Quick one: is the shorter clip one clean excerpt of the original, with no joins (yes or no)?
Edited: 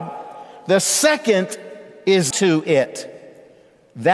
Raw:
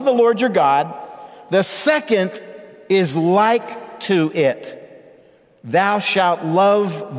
no